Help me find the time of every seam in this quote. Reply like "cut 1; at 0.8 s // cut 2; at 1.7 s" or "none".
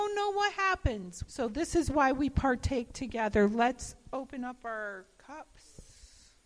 cut 1; at 1.3 s